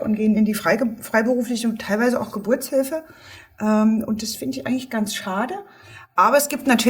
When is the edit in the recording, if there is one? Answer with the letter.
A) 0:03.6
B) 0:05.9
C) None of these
C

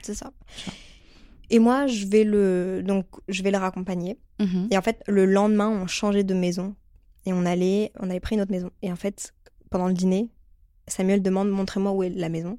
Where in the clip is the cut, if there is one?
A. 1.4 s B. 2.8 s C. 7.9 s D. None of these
C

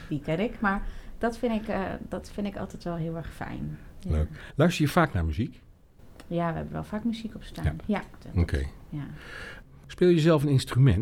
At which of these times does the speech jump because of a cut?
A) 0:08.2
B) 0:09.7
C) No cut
A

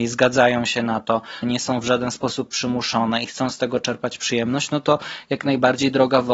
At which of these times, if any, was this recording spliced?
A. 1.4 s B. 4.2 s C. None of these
A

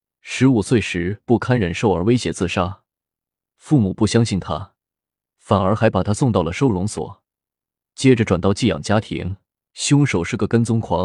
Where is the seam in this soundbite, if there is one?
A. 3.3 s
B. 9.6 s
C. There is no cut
B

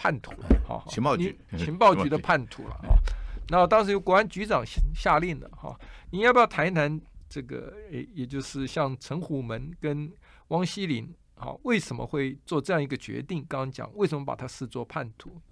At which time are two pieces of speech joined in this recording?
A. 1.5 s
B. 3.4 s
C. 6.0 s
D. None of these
A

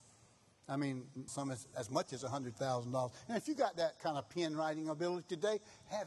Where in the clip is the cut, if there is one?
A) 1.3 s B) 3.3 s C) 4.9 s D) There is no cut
A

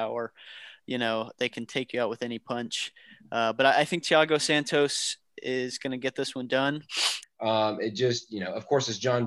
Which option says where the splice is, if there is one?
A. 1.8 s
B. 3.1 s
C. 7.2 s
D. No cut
C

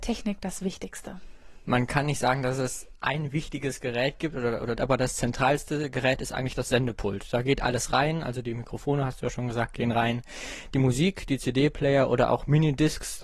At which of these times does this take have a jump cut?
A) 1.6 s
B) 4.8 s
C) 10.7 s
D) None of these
B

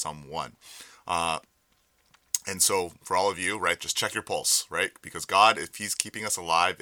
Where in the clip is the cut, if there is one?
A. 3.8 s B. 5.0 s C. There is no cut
A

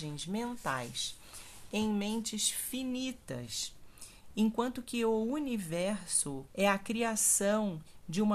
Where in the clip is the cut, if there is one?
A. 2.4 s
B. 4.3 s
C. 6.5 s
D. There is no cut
C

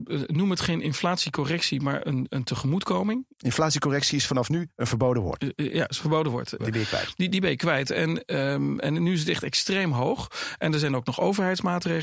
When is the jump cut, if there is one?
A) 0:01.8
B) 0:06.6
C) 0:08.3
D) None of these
B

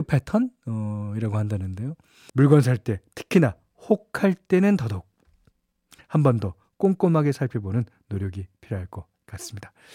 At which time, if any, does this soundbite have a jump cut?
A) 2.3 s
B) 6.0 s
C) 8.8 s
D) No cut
A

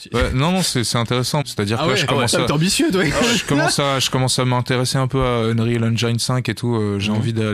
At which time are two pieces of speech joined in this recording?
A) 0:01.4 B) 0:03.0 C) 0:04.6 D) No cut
A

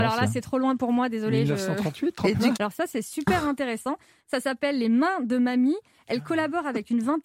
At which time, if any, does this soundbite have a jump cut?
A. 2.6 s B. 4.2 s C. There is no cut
A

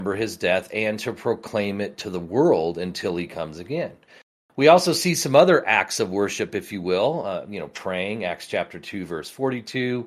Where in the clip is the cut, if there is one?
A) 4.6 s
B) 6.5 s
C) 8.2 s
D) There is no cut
D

